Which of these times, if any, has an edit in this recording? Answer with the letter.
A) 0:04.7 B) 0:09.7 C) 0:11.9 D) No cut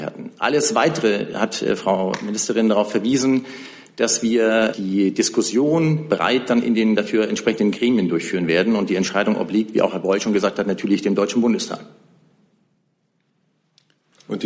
A